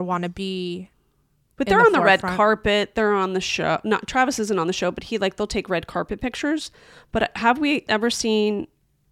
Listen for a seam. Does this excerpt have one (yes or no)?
no